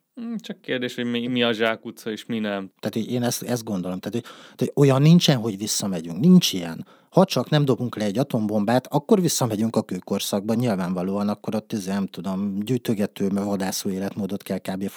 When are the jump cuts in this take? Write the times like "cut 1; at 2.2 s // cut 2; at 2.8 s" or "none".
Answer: cut 1; at 2.7 s

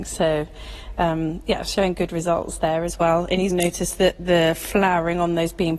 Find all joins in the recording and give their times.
cut 1; at 3.5 s

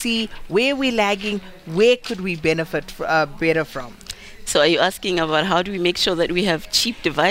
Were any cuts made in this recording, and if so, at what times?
none

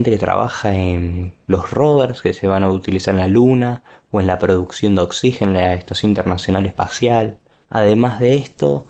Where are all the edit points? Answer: none

